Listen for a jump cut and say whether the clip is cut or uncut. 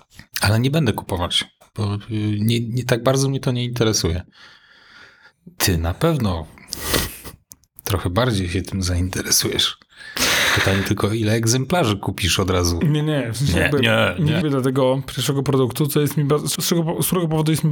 cut